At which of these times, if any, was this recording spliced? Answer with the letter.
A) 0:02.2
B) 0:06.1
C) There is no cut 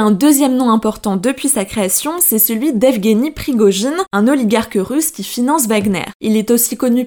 C